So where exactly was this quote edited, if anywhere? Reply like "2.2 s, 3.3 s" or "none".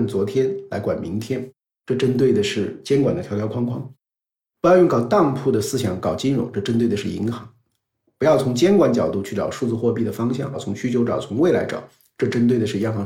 10.5 s